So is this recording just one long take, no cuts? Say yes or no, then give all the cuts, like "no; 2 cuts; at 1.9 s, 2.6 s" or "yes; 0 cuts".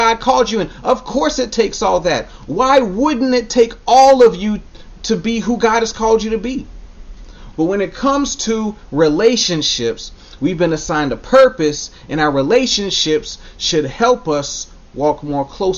no; 2 cuts; at 7.5 s, 10.4 s